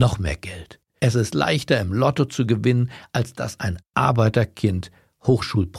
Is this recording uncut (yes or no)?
no